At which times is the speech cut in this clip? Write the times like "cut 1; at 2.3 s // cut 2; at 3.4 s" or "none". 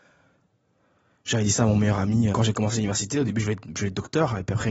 cut 1; at 2.3 s